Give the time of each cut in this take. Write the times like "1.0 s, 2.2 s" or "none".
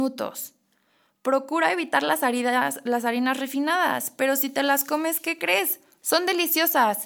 none

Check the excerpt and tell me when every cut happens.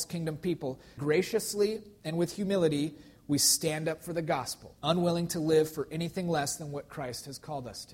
1.0 s, 4.8 s

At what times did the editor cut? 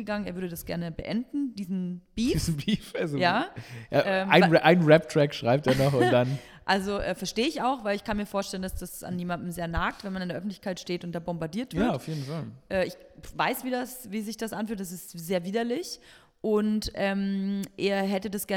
none

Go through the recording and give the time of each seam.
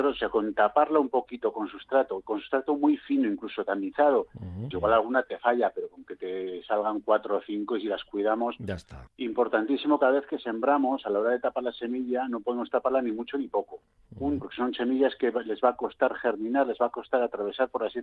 4.7 s, 9.1 s, 14.4 s

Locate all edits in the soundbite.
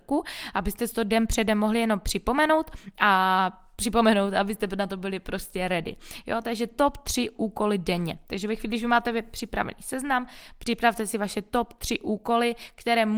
none

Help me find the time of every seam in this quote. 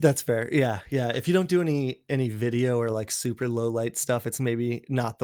none

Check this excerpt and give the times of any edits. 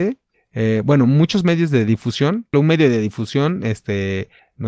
2.5 s

